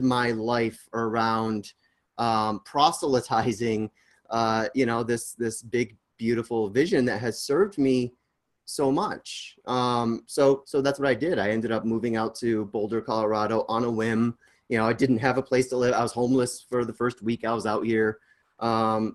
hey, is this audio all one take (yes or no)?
yes